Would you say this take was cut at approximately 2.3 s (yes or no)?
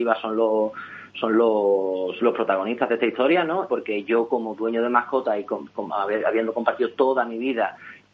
no